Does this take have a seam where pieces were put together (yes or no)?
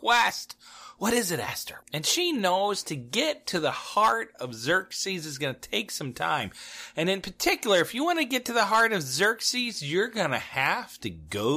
yes